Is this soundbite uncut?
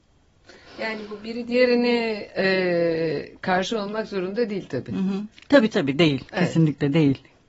yes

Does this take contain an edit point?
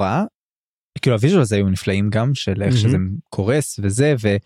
no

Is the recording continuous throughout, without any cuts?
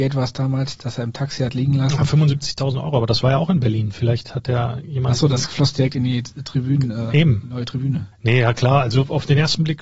no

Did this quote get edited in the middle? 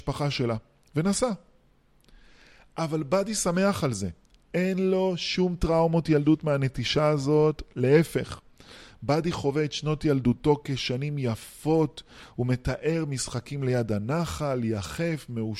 no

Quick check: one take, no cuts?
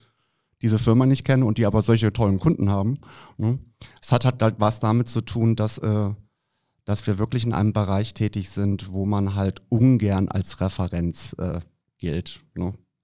yes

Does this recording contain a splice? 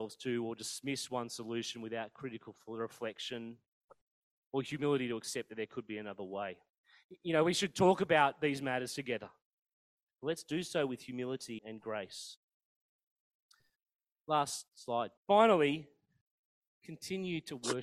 yes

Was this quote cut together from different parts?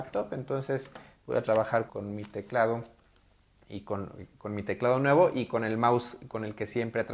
yes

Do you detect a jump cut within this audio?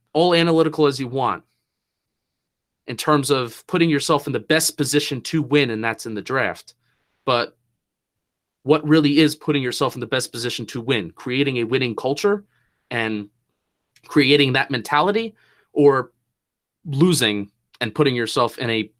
no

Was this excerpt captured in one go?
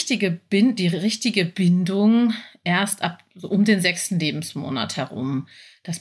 yes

